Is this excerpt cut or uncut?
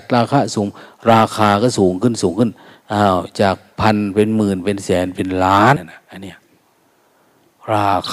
cut